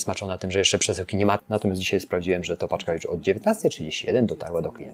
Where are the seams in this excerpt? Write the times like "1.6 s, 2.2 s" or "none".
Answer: 1.4 s